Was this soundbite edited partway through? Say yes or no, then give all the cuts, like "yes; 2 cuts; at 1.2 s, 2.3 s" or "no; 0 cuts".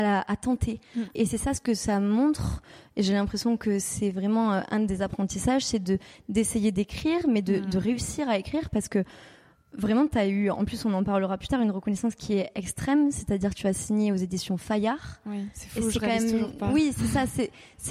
yes; 1 cut; at 1.2 s